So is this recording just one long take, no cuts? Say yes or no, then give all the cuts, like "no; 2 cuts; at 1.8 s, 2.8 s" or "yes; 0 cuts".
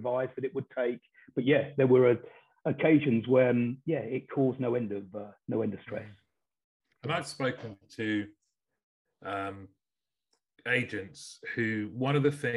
yes; 0 cuts